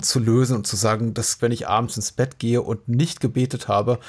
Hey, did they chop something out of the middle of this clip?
yes; 1 cut; at 1.4 s

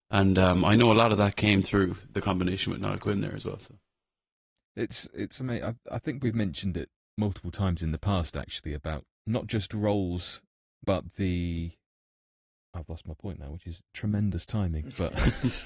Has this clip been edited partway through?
yes; 2 cuts; at 9.1 s, 10.8 s

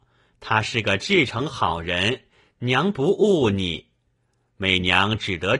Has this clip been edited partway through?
no; 0 cuts

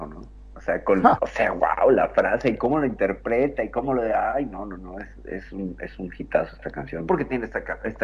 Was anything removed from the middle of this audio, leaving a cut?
yes; 2 cuts; at 1.2 s, 7.1 s

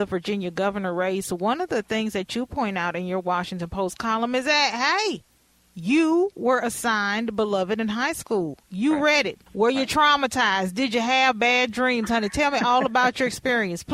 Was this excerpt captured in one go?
no; 1 cut; at 9.5 s

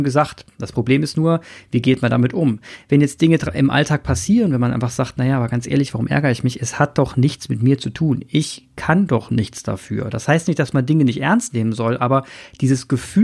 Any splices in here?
no; 0 cuts

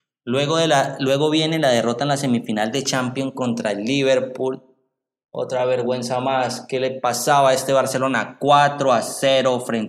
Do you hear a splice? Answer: no; 0 cuts

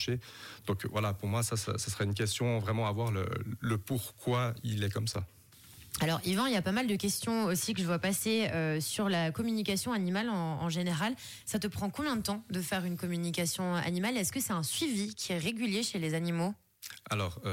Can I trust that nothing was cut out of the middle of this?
yes; 0 cuts

